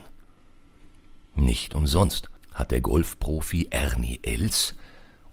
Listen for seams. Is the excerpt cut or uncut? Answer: uncut